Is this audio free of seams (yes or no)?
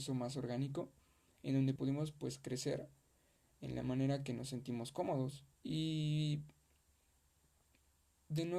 no